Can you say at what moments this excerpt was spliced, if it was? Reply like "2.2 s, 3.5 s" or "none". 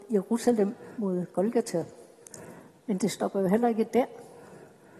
none